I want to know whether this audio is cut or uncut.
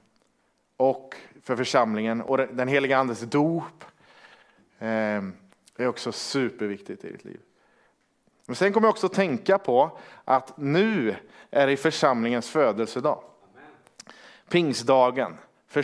uncut